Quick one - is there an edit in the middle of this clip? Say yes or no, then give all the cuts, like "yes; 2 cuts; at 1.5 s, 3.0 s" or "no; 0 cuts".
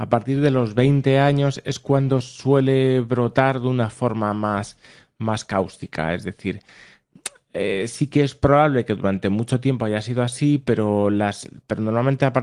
no; 0 cuts